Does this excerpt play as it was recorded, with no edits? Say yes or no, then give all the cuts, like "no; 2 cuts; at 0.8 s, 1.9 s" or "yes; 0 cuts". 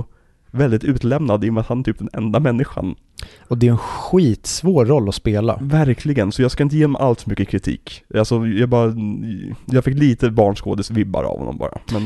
yes; 0 cuts